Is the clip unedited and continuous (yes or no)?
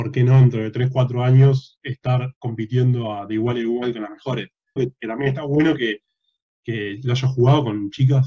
no